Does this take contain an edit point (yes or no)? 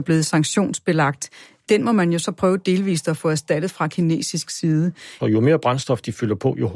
yes